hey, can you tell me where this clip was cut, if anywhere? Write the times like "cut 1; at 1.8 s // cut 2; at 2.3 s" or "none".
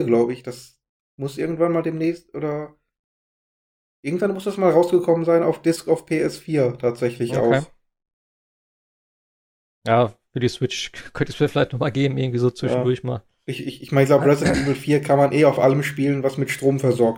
none